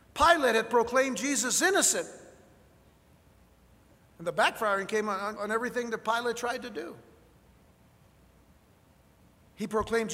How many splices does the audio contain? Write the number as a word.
one